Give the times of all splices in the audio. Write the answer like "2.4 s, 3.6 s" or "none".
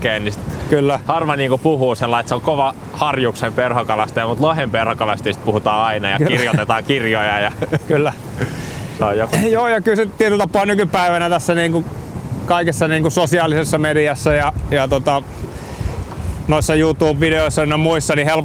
none